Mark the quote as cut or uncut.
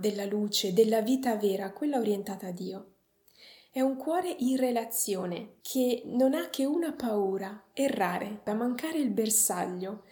cut